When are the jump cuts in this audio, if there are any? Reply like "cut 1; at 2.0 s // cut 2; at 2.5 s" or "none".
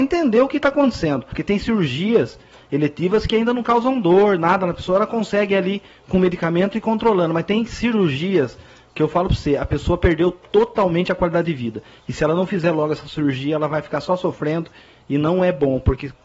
cut 1; at 1.3 s